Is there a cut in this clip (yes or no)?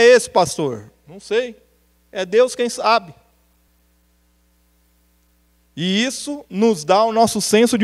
no